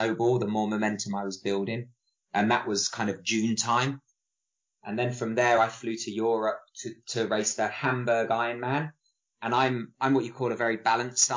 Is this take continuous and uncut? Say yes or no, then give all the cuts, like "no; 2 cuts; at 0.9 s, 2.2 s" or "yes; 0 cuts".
yes; 0 cuts